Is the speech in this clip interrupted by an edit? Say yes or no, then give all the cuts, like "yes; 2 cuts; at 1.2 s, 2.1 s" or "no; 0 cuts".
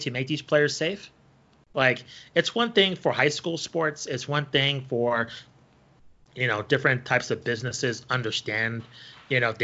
no; 0 cuts